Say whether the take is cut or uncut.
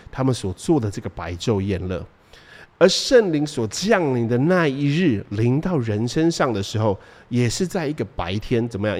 uncut